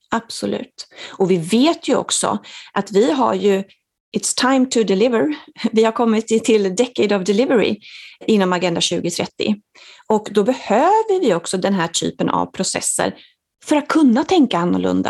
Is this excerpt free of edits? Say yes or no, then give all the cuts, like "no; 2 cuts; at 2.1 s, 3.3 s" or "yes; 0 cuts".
yes; 0 cuts